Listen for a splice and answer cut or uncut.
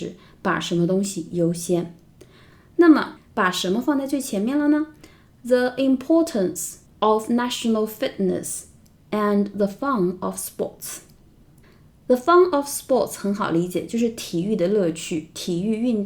cut